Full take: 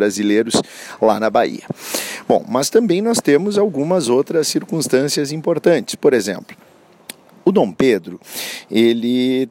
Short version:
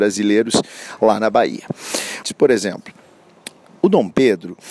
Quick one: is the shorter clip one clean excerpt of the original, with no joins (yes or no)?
no